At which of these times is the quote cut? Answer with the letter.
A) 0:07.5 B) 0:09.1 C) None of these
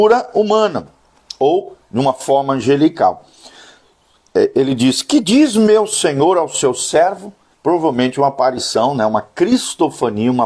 A